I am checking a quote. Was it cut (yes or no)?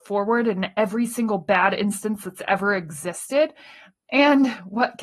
no